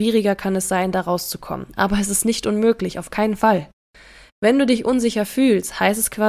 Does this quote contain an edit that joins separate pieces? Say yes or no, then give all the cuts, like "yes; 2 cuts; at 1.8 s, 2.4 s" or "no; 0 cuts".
no; 0 cuts